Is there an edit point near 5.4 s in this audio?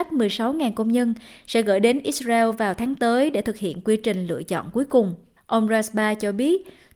no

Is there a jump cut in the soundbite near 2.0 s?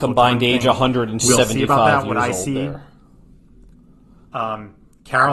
no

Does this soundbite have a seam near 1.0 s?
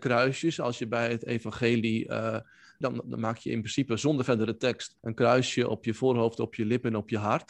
no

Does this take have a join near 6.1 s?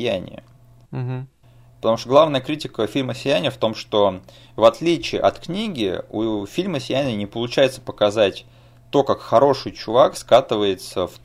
no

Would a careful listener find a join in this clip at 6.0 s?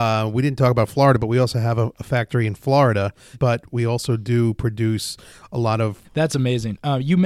yes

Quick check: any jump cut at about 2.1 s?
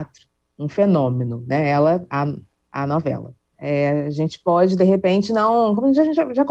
no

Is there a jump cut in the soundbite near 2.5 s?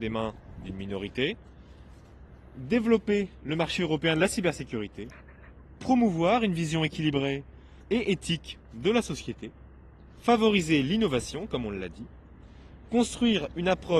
no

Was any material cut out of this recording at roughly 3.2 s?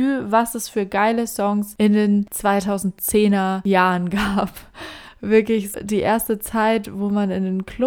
no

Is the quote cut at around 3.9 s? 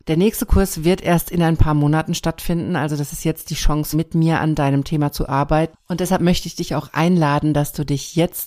yes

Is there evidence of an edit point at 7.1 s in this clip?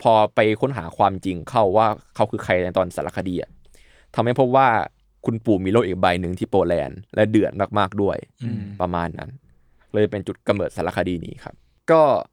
yes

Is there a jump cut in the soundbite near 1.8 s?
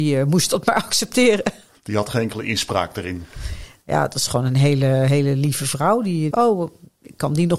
no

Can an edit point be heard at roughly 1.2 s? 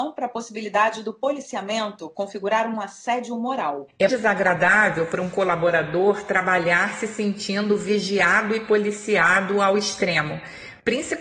no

